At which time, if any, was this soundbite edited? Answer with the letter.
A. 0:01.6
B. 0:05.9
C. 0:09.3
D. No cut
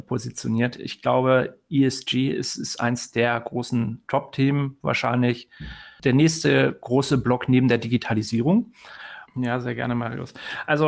C